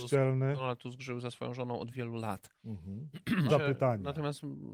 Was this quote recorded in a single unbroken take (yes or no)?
no